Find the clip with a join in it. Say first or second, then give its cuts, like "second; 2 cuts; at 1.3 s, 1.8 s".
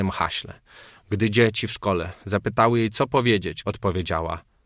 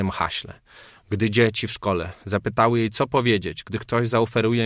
first; 1 cut; at 3.6 s